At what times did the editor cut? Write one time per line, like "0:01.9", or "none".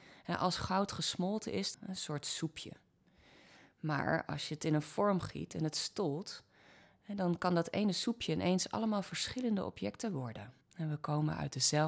0:01.7
0:10.6